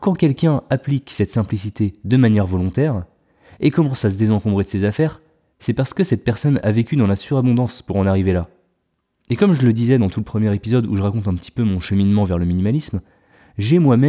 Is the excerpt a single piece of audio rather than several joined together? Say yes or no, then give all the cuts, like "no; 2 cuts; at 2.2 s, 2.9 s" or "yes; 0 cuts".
yes; 0 cuts